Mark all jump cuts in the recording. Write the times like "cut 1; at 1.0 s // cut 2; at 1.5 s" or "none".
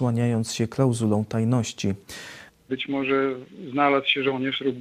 cut 1; at 2.5 s